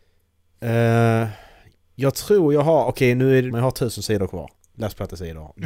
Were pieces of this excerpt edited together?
yes; 1 cut; at 3.5 s

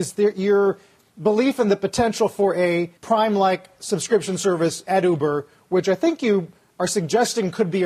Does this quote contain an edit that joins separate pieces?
yes; 1 cut; at 3.0 s

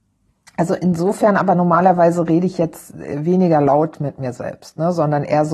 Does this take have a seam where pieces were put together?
no; 0 cuts

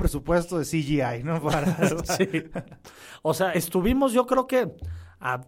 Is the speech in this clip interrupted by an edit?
no; 0 cuts

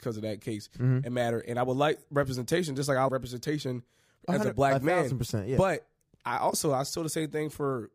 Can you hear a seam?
yes; 1 cut; at 3.1 s

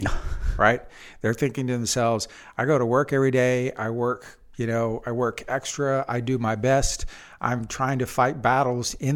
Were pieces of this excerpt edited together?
no; 0 cuts

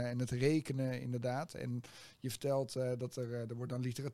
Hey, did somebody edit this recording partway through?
no; 0 cuts

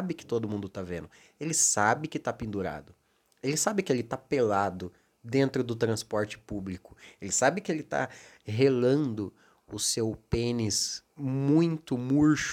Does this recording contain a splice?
yes; 1 cut; at 11.1 s

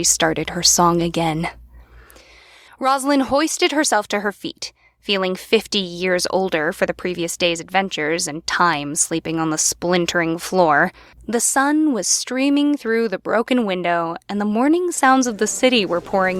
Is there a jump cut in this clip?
yes; 2 cuts; at 2.7 s, 11.1 s

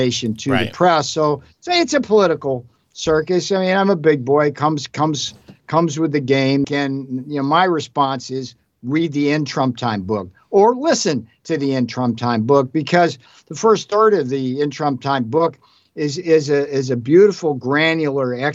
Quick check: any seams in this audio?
yes; 1 cut; at 6.6 s

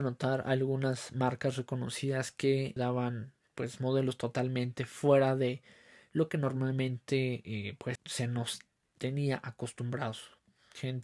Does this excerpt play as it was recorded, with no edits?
no; 2 cuts; at 2.8 s, 8.0 s

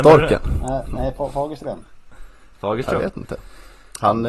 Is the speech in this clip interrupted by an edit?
no; 0 cuts

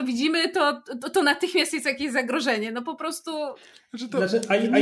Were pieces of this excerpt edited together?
no; 0 cuts

